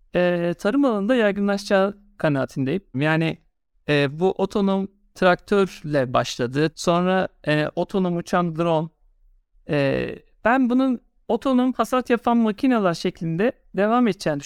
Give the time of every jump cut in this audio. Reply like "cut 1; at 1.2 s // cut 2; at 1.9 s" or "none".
cut 1; at 2.9 s // cut 2; at 6.7 s

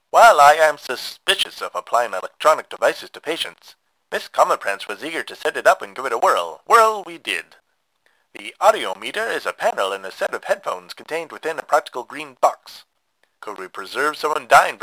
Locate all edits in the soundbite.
cut 1; at 6.7 s // cut 2; at 13.4 s

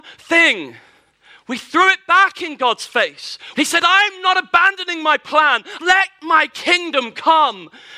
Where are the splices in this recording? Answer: cut 1; at 3.5 s // cut 2; at 5.8 s

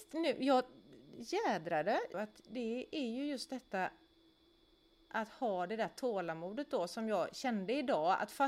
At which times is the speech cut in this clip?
cut 1; at 2.1 s

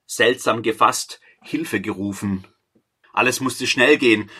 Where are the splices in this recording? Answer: cut 1; at 3.0 s

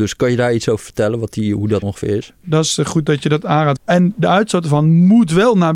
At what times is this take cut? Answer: cut 1; at 1.8 s // cut 2; at 3.8 s

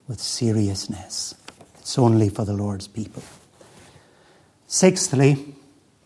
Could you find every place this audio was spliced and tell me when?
none

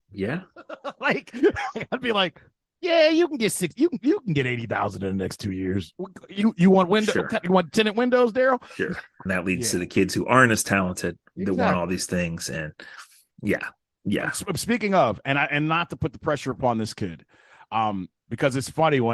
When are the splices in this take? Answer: cut 1; at 9.3 s

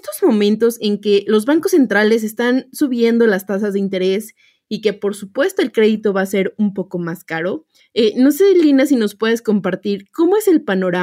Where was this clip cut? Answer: none

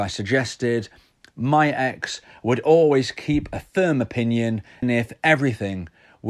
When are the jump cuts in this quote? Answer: cut 1; at 4.8 s

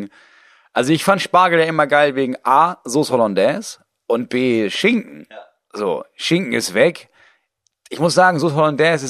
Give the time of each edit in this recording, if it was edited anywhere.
none

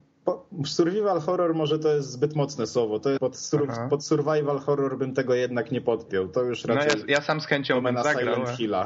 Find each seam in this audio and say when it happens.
cut 1; at 3.2 s

